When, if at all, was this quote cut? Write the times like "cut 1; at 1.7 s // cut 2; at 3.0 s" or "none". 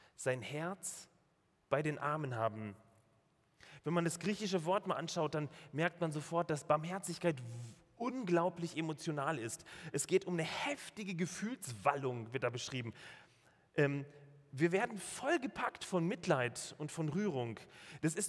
none